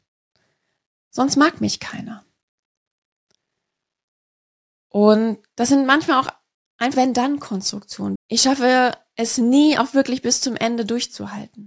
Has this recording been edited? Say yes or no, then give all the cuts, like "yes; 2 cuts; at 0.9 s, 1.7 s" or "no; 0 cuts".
yes; 2 cuts; at 6.9 s, 8.2 s